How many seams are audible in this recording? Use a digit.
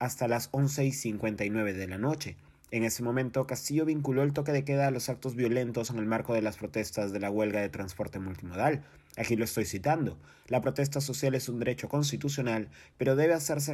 1